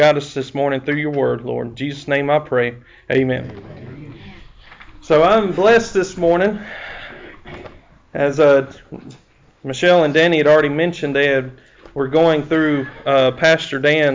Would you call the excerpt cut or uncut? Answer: uncut